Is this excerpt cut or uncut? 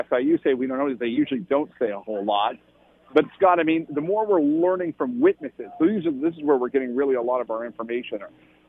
uncut